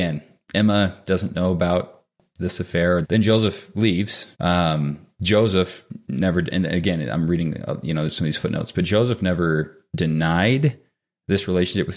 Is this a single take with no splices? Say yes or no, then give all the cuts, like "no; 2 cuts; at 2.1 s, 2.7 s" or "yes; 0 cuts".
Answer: no; 2 cuts; at 3.0 s, 4.3 s